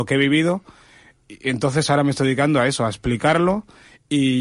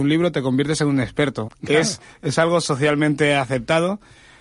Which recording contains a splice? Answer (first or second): second